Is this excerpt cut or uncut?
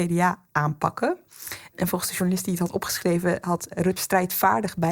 cut